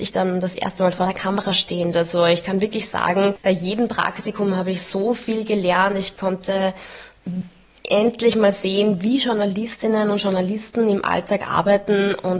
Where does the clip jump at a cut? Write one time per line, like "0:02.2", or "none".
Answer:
0:01.9